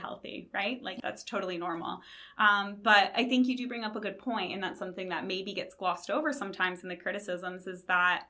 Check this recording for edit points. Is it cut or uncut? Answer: cut